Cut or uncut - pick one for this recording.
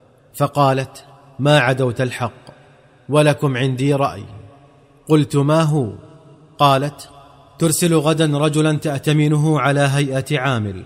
uncut